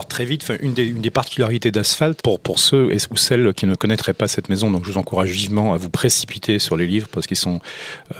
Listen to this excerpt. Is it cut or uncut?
cut